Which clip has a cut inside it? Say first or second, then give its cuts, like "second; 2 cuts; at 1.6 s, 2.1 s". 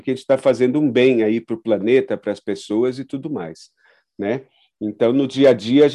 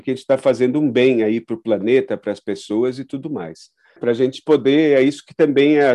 second; 1 cut; at 4.0 s